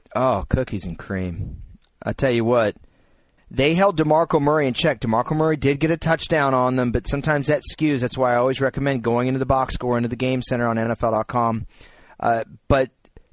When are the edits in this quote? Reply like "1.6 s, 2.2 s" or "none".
3.4 s